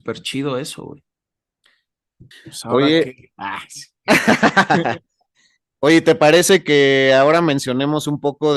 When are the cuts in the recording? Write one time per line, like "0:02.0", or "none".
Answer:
0:02.3